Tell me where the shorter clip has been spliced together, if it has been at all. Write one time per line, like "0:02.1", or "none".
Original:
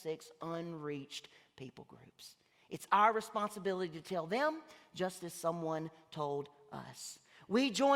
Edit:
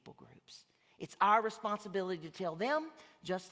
none

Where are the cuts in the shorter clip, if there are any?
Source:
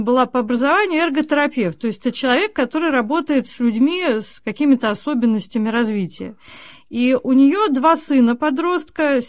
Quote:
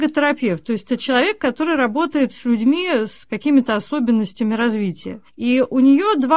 0:05.3

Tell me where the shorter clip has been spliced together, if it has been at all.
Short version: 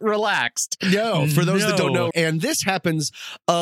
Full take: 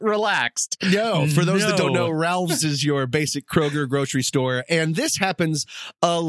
0:02.1

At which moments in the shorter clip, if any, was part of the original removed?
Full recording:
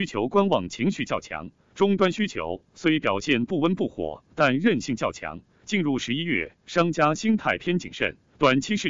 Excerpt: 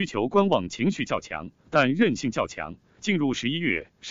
0:01.6

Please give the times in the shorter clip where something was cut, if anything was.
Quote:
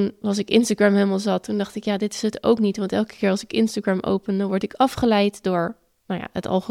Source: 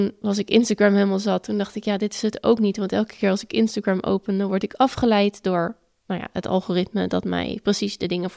none

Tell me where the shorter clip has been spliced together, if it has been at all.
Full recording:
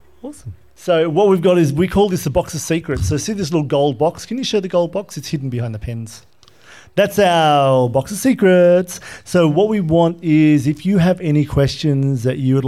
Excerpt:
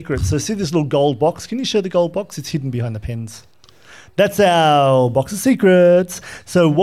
none

